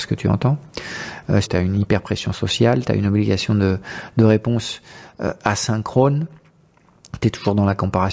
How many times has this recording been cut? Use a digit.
1